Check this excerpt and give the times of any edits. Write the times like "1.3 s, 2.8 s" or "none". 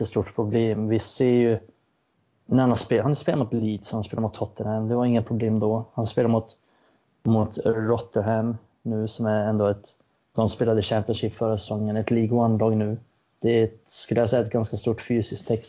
none